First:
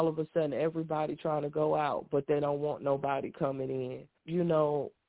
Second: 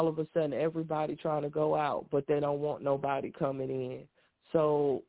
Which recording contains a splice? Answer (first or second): first